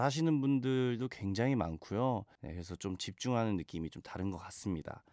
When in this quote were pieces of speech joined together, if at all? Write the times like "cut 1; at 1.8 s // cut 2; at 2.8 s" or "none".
cut 1; at 2.4 s